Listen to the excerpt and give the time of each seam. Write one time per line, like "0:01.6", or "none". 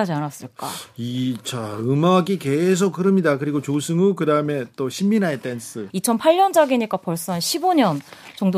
0:05.9